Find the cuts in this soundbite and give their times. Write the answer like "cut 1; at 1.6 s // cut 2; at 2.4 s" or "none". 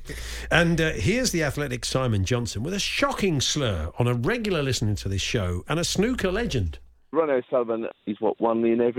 cut 1; at 7.9 s